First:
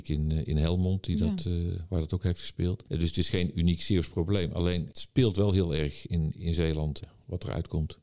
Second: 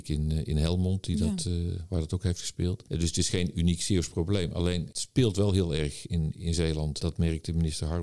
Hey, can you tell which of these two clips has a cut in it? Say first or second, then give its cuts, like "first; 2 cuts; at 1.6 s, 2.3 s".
first; 1 cut; at 7.0 s